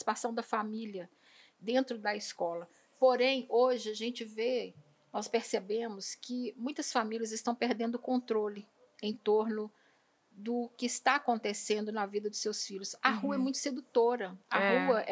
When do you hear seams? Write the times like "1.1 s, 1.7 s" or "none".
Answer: none